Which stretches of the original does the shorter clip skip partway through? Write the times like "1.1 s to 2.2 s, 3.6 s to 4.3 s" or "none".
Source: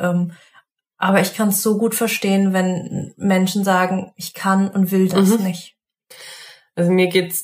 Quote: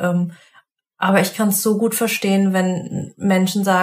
none